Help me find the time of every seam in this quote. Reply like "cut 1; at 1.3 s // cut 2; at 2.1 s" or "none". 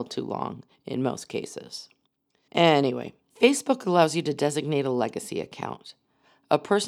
cut 1; at 2.5 s